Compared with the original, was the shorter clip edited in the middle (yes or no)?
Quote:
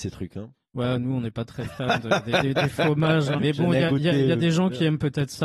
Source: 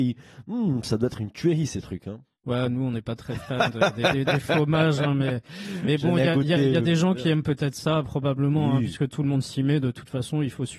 yes